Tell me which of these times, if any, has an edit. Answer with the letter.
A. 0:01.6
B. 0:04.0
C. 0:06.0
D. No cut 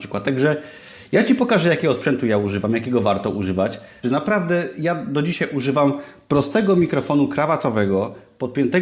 B